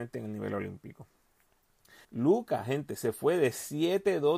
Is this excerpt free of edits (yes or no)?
no